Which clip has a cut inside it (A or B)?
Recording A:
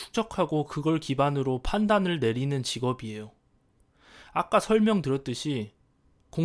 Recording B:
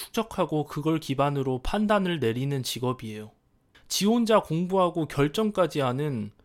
B